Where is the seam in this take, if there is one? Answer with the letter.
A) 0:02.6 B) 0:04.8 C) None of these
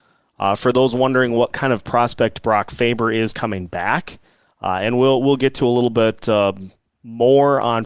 C